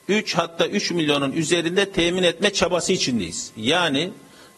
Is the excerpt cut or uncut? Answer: uncut